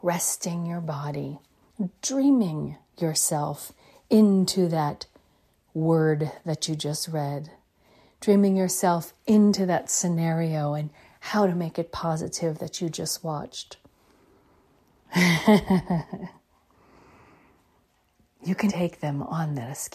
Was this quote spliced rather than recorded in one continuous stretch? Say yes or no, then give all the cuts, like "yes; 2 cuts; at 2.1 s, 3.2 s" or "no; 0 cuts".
yes; 2 cuts; at 15.0 s, 18.7 s